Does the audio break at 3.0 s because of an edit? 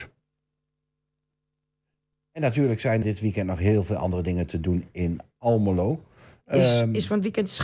yes; 1 cut; at 3.0 s

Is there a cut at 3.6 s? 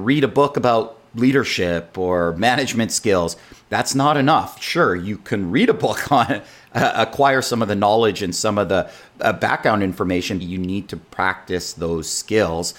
no; 1 cut; at 10.4 s

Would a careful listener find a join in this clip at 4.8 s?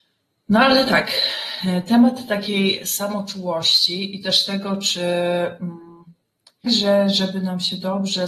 no; 1 cut; at 6.7 s

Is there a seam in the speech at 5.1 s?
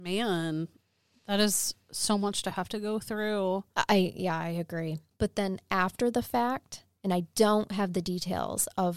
yes; 1 cut; at 5.1 s

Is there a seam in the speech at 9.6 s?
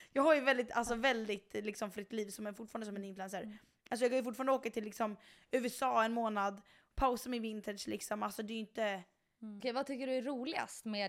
yes; 1 cut; at 9.6 s

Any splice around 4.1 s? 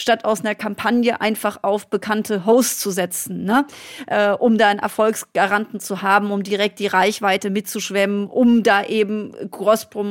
no; 0 cuts

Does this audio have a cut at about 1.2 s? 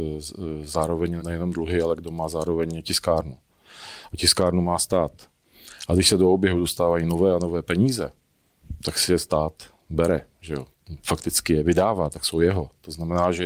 yes; 1 cut; at 1.2 s

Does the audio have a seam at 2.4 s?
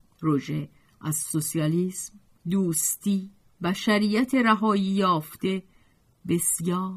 yes; 1 cut; at 2.4 s

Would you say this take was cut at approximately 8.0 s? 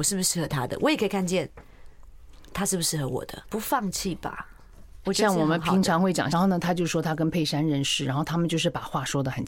no; 3 cuts; at 3.4 s, 5.0 s, 6.3 s

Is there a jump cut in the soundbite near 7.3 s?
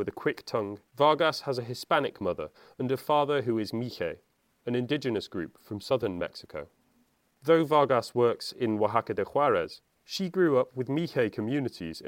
no; 0 cuts

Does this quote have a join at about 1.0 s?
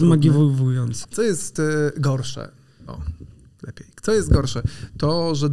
yes; 1 cut; at 1.0 s

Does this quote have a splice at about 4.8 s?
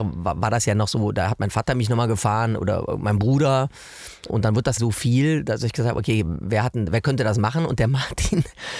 yes; 1 cut; at 4.8 s

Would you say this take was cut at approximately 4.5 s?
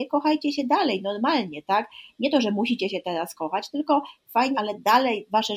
yes; 1 cut; at 4.5 s

